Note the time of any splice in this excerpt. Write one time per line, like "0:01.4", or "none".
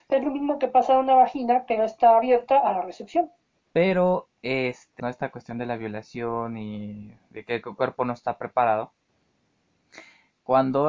0:03.6
0:05.0

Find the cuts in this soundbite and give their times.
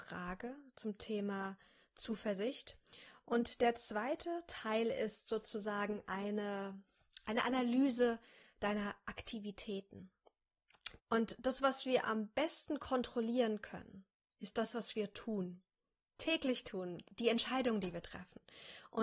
0:11.0

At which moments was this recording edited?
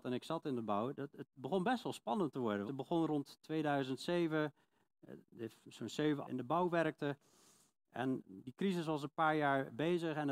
0:02.7
0:06.2

